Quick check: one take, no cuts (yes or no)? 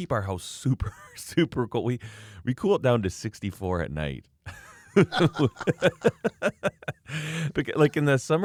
yes